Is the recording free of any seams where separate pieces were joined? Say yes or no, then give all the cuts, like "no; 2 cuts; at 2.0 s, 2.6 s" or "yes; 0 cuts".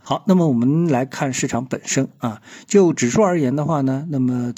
yes; 0 cuts